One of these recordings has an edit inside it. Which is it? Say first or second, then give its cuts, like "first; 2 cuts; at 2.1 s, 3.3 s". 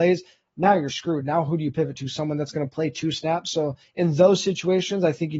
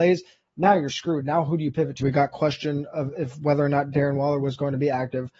second; 1 cut; at 2.0 s